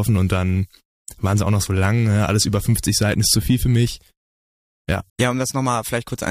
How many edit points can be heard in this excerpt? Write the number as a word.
one